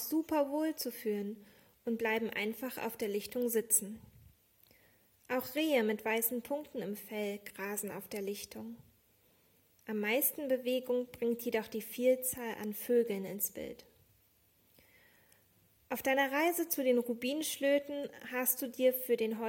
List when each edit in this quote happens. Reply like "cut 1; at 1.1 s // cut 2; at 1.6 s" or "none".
none